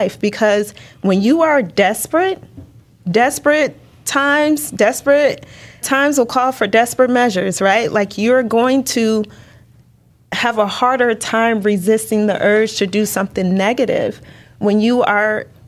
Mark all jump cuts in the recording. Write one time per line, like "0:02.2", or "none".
0:05.8